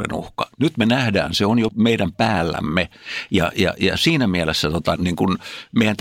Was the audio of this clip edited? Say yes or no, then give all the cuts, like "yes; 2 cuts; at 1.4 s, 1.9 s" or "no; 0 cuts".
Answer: yes; 2 cuts; at 1.7 s, 5.0 s